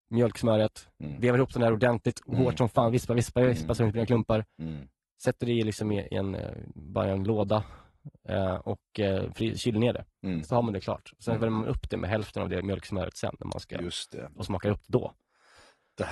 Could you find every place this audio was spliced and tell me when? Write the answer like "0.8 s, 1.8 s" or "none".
none

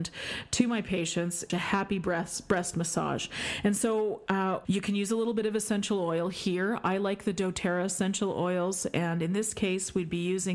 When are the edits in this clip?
1.5 s, 4.6 s

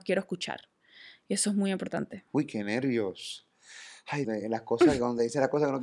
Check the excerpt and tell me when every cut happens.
4.2 s

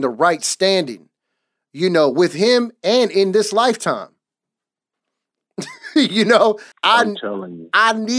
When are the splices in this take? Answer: 5.0 s, 6.7 s

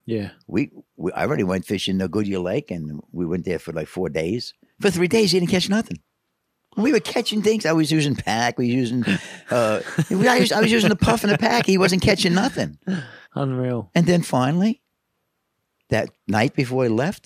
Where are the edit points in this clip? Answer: 13.2 s

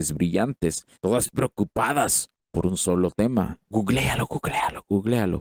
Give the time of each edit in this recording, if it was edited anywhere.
1.0 s, 3.7 s

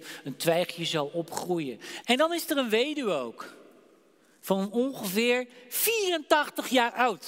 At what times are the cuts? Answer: 2.0 s

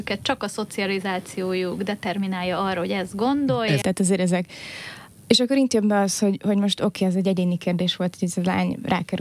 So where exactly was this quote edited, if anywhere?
3.8 s

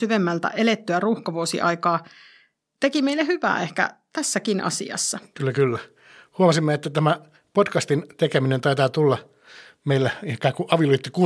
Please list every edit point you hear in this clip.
none

